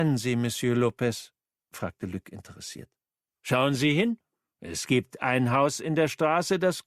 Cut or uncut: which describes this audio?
uncut